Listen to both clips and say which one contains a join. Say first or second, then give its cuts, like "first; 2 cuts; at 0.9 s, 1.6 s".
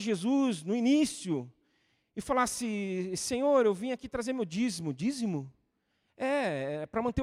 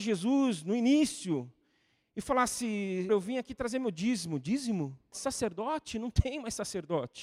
second; 2 cuts; at 3.1 s, 5.1 s